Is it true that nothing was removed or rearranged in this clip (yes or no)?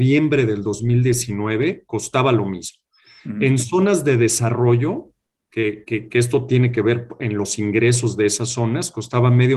yes